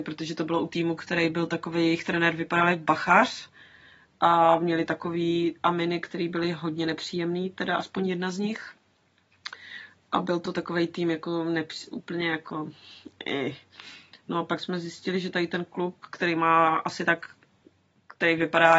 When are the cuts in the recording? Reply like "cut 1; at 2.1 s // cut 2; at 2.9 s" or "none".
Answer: none